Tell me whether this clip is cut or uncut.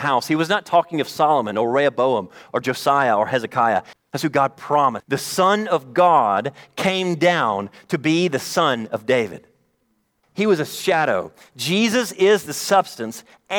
cut